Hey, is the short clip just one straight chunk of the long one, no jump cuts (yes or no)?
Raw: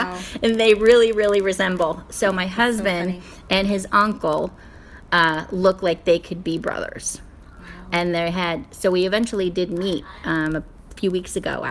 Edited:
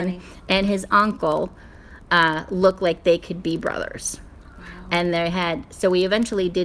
yes